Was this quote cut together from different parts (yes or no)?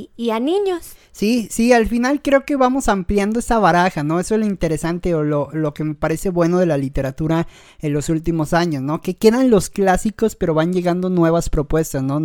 no